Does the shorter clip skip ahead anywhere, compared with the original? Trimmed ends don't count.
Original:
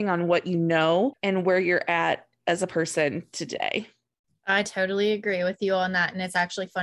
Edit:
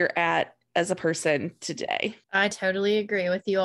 yes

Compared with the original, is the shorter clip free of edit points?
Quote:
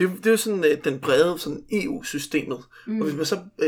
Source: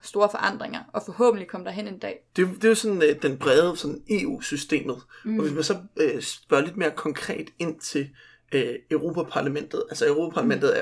yes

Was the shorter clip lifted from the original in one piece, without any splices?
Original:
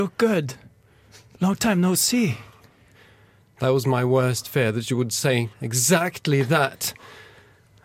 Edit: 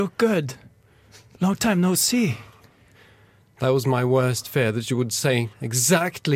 yes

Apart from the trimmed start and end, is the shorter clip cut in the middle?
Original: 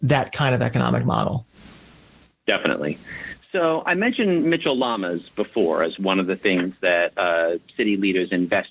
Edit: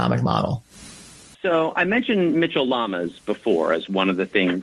yes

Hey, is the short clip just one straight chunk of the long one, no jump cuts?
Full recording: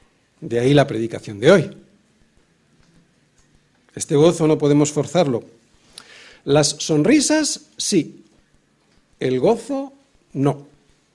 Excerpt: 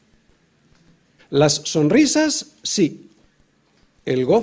no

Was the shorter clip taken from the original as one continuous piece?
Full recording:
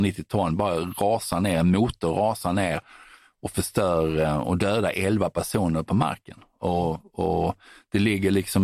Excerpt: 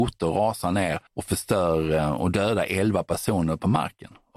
no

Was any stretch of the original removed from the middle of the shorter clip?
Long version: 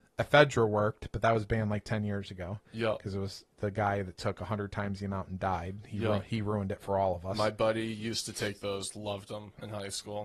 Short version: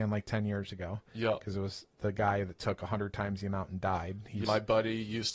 yes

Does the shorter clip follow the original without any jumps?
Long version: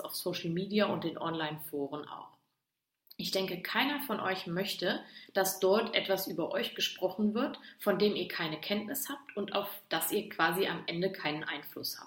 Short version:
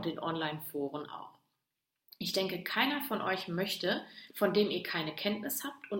no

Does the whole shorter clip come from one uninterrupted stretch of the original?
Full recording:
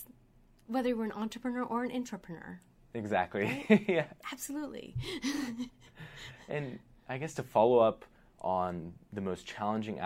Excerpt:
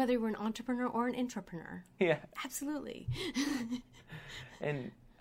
no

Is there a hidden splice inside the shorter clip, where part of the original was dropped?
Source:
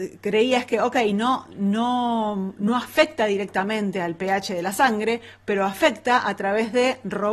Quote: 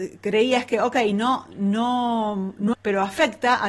yes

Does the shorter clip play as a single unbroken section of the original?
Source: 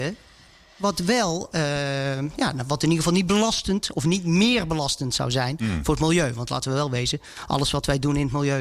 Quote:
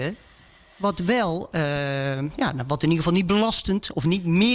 yes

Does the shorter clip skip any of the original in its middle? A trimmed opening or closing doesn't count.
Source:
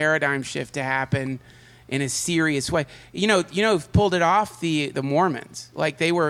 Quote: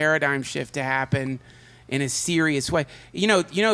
no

